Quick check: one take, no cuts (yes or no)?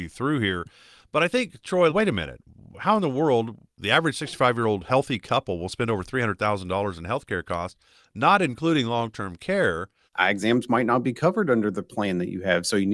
no